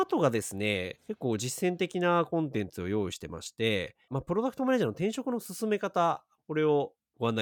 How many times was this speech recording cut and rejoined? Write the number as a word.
one